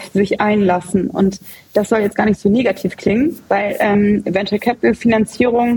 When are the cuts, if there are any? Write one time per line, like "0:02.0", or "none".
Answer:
none